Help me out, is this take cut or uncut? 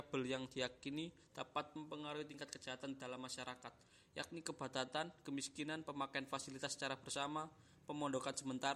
uncut